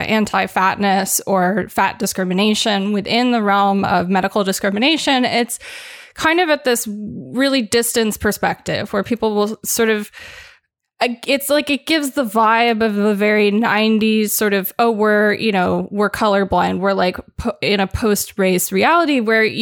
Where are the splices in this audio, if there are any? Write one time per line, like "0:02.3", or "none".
none